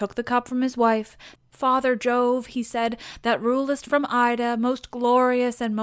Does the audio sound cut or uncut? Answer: cut